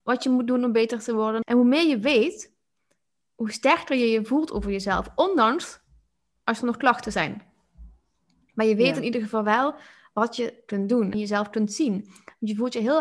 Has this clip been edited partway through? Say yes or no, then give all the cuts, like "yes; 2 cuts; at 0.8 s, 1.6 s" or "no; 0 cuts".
yes; 2 cuts; at 1.4 s, 11.1 s